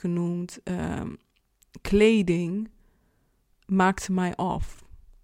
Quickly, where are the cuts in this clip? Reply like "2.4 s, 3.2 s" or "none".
none